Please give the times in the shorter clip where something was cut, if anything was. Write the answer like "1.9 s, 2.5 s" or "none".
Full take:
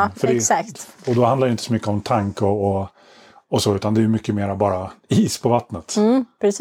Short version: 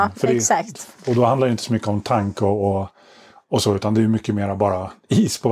none